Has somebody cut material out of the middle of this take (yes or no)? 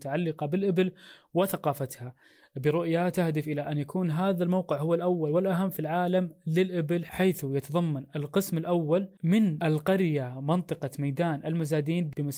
no